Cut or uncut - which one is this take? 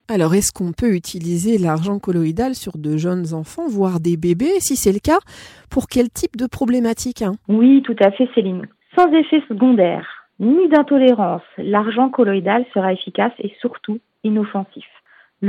cut